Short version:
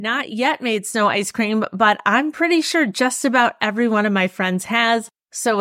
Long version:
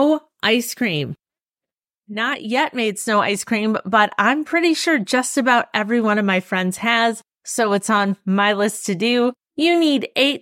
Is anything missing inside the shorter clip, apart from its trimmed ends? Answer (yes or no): no